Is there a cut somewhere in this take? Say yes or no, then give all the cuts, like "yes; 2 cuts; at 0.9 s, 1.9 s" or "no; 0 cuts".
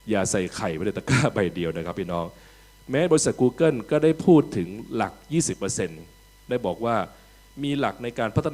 no; 0 cuts